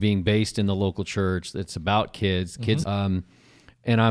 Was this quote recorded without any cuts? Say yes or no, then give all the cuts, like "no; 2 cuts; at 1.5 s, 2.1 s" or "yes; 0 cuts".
no; 1 cut; at 2.8 s